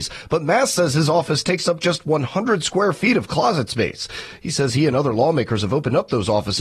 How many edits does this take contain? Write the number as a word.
zero